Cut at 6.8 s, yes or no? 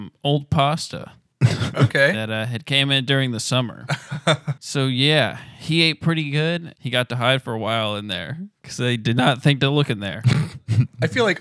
yes